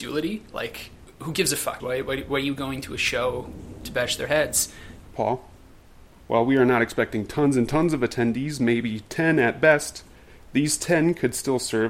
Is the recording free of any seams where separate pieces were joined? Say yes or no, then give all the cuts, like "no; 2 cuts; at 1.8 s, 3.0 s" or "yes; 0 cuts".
no; 2 cuts; at 1.8 s, 5.1 s